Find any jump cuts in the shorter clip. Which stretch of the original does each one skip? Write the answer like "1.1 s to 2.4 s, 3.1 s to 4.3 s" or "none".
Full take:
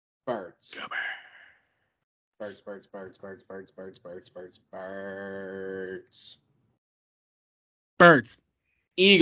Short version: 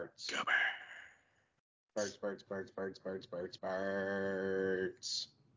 2.9 s to 3.2 s, 4.3 s to 4.7 s

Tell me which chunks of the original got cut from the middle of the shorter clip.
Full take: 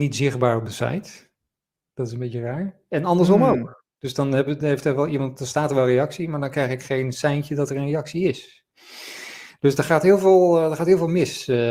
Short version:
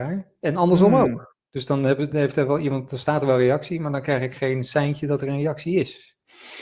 none

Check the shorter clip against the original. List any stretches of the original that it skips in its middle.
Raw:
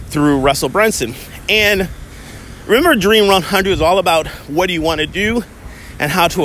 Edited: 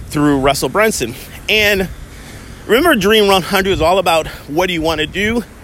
none

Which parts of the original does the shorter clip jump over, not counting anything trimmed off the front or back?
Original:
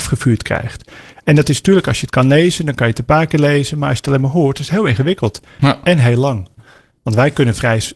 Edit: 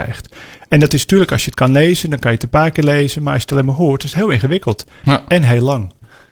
none

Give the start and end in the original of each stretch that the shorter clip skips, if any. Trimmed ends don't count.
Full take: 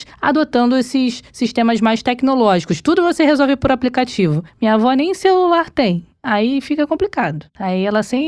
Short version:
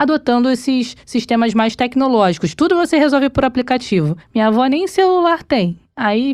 none

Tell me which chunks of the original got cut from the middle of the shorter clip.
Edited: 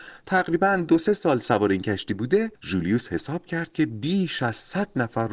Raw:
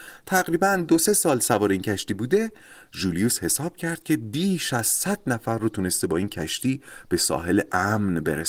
2.5 s to 2.9 s

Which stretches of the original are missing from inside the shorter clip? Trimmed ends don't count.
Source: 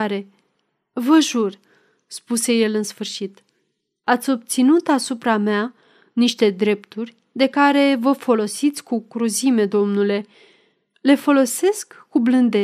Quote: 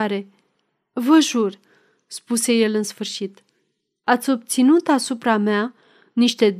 none

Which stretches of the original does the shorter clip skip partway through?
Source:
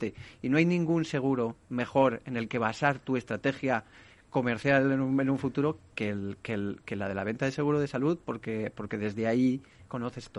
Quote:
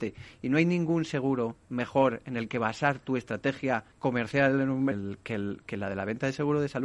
3.9 s to 4.2 s, 5.2 s to 6.1 s

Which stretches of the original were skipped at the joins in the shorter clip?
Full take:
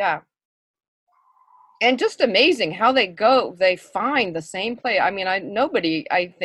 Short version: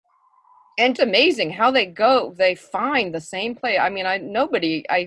2.0 s to 2.2 s

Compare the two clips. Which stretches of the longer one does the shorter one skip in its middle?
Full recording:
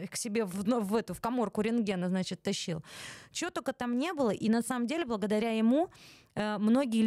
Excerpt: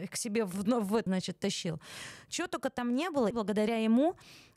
1.1 s to 2.1 s, 4.3 s to 5.0 s

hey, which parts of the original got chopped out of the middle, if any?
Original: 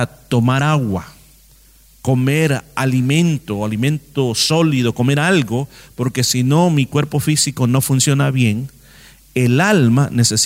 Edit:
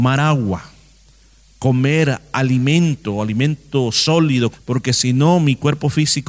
4.9 s to 5.8 s

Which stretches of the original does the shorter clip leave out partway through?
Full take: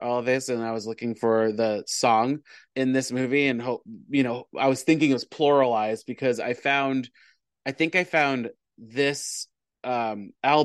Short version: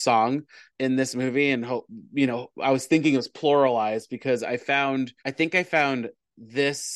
7.2 s to 7.6 s

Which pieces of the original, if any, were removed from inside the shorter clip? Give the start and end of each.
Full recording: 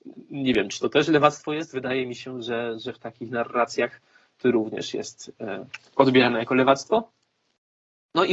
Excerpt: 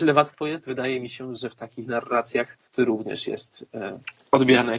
2.4 s to 2.8 s, 4.1 s to 4.3 s

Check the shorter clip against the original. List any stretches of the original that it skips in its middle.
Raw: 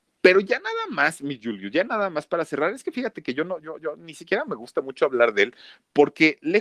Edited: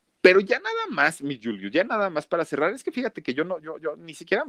none

